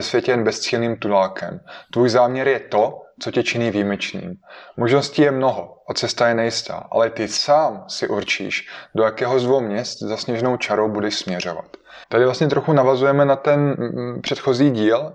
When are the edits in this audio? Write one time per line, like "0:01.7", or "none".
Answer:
0:12.0